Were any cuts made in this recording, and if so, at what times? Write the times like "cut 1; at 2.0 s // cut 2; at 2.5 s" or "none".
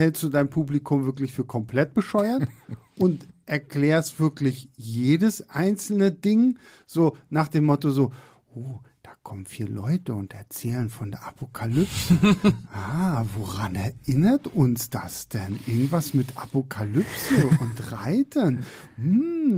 none